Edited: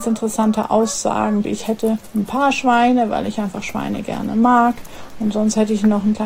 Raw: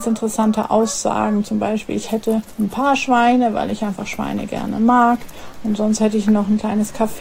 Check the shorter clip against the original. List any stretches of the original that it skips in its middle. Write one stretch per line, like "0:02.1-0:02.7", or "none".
0:01.4-0:01.9